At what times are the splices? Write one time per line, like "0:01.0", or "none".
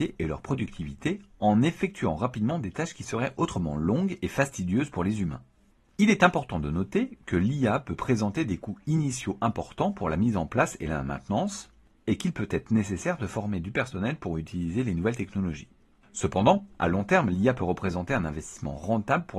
none